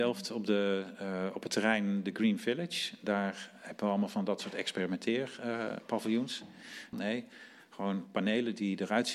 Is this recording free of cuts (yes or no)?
no